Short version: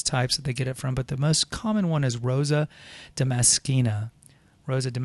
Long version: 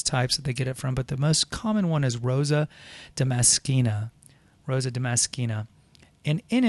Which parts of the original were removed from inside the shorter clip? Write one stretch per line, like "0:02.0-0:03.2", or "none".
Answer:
none